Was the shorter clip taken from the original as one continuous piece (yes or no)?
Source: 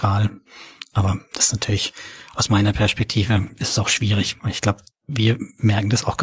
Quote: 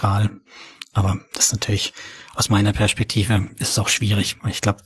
yes